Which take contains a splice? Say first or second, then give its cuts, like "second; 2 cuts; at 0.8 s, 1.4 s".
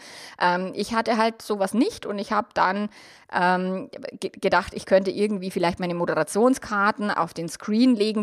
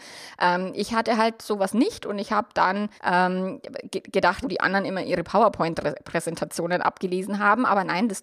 second; 2 cuts; at 3.0 s, 4.4 s